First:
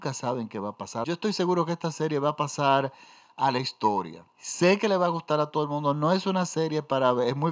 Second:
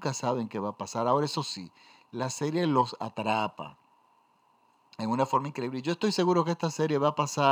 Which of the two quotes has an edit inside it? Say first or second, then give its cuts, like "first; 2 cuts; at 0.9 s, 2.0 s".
first; 2 cuts; at 1.0 s, 4.3 s